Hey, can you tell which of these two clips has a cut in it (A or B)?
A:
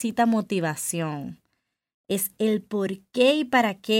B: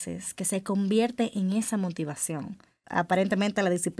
B